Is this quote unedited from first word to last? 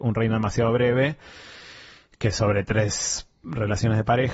yes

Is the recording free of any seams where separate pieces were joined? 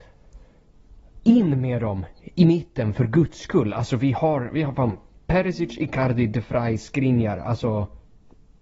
yes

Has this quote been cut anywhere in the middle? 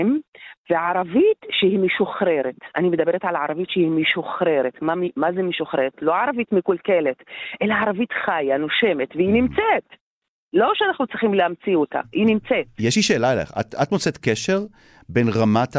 no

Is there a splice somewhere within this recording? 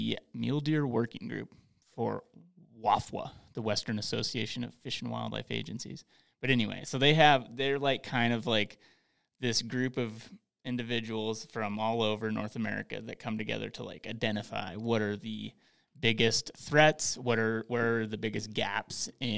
no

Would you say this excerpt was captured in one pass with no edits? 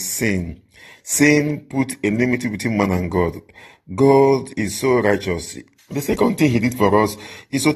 no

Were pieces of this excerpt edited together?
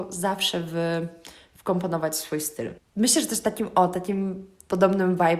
yes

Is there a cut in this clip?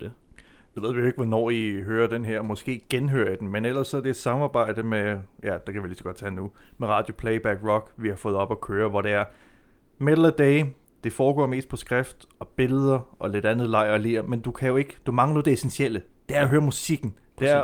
no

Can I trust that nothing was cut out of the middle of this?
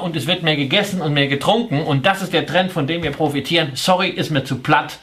yes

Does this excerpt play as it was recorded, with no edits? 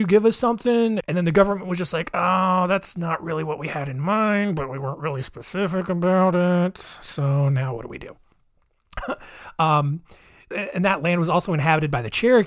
no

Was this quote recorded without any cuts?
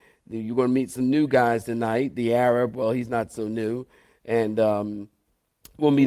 yes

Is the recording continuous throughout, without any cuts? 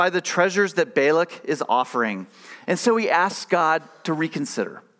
yes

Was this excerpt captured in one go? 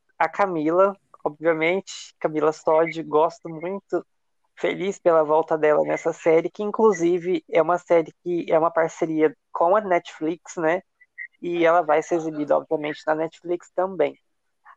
yes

